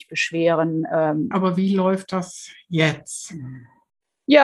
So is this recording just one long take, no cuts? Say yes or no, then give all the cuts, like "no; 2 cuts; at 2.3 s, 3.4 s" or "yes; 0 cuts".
no; 1 cut; at 1.3 s